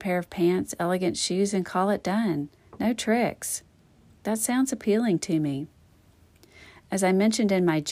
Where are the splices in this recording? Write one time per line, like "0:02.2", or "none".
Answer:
none